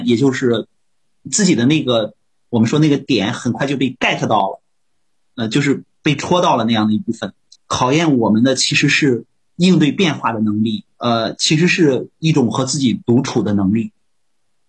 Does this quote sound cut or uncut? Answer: cut